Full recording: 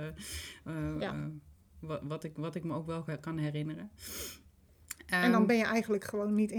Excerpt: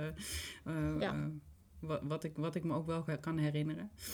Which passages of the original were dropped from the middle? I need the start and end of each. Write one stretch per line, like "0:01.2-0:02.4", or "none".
none